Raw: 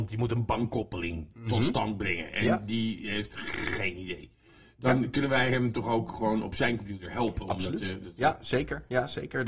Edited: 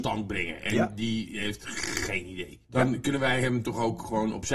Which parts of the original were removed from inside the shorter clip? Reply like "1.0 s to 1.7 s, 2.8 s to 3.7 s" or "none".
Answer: 4.4 s to 4.7 s